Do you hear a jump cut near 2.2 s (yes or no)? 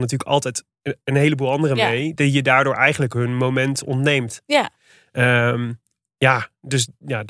yes